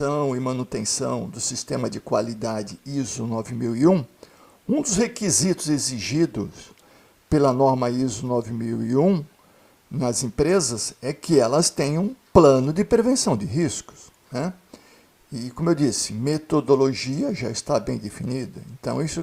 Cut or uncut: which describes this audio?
uncut